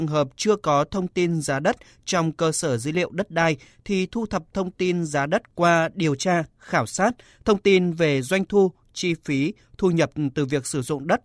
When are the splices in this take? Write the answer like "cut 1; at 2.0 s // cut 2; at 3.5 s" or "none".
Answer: none